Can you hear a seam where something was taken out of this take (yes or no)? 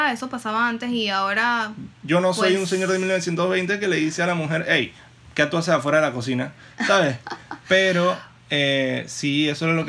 no